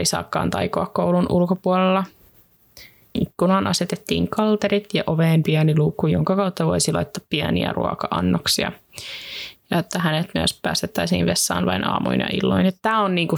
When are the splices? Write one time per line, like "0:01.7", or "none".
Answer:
0:03.1